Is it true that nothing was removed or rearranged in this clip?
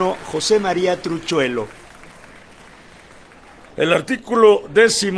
no; 1 cut; at 3.6 s

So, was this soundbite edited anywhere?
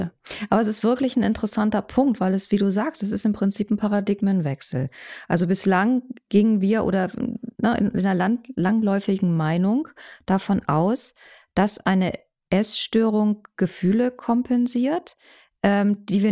no; 0 cuts

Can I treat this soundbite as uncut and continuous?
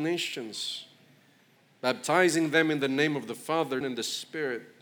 no; 1 cut; at 3.8 s

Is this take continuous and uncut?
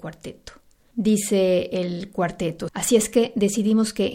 no; 2 cuts; at 0.9 s, 2.7 s

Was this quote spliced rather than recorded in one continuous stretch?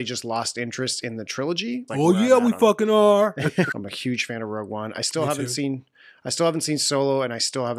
yes; 2 cuts; at 1.9 s, 3.7 s

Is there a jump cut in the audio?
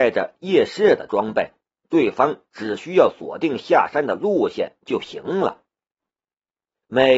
yes; 1 cut; at 1.8 s

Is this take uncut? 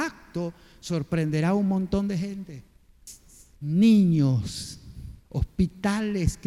no; 2 cuts; at 3.5 s, 5.2 s

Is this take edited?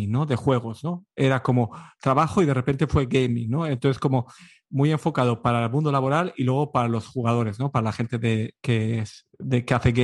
no; 0 cuts

